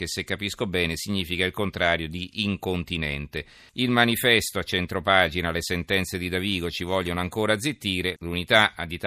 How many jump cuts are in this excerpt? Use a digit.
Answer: 2